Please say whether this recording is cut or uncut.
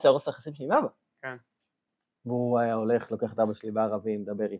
uncut